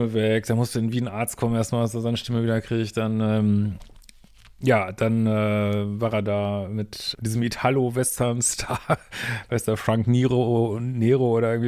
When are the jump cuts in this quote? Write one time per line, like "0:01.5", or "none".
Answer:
0:07.1